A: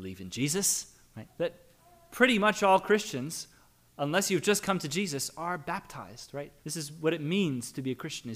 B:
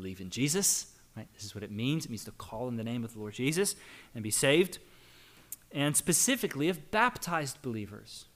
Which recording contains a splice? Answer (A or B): A